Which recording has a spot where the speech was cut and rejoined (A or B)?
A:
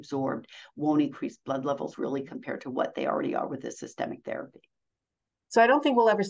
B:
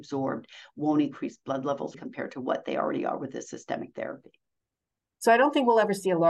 B